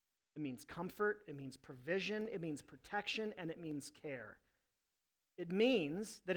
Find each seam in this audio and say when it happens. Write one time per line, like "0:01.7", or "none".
none